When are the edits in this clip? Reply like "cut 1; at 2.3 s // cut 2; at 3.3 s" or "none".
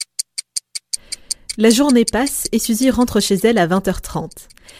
none